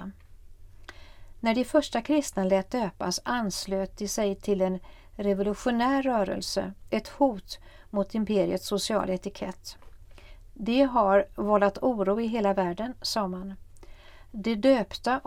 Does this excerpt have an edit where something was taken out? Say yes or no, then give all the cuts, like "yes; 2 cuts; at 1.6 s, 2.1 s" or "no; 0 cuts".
yes; 1 cut; at 6.9 s